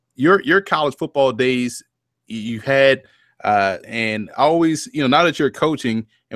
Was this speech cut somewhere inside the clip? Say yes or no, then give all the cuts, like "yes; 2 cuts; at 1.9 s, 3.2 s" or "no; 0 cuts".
yes; 1 cut; at 3.8 s